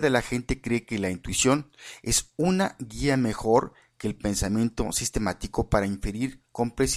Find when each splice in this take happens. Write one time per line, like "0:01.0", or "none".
none